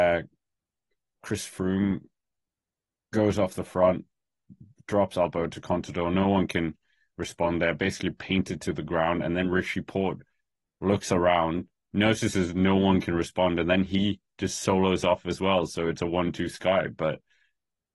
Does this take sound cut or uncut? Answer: uncut